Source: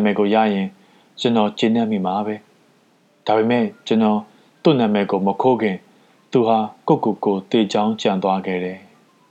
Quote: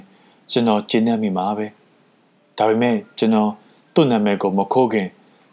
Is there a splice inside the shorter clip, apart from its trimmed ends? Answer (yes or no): no